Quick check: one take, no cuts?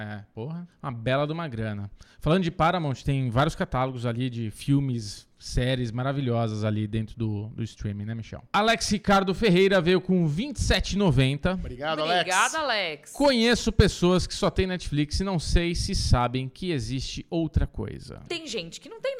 no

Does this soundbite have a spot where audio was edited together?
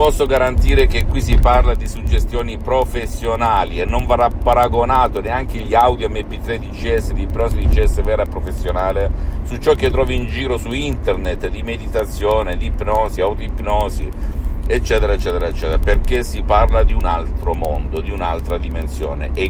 no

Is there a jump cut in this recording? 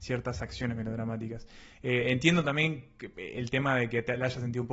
no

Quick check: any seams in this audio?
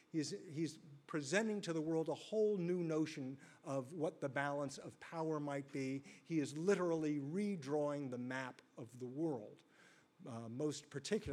no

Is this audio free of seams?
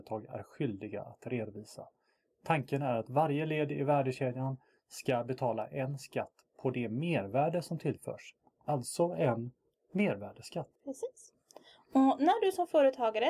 no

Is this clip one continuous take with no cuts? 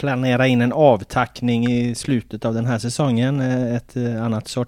yes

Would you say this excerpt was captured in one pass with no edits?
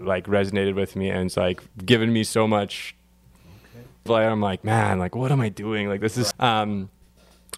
no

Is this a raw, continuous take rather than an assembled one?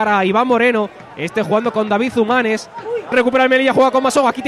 no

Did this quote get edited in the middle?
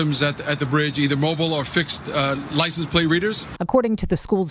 yes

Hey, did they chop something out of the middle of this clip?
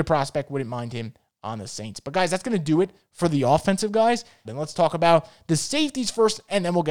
yes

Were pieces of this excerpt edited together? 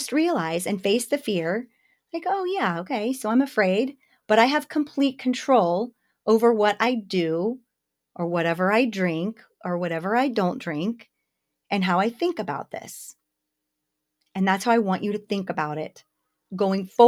no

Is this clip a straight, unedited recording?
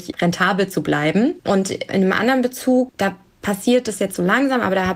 no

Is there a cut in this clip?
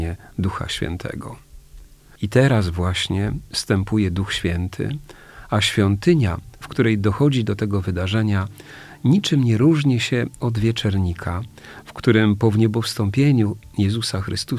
no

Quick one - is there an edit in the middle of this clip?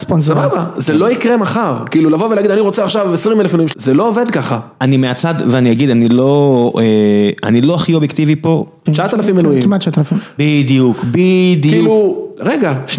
yes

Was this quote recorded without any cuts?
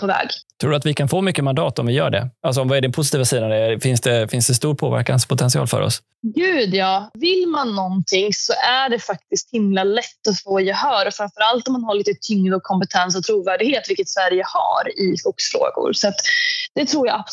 yes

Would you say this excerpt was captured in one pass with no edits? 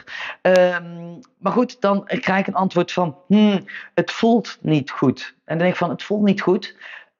yes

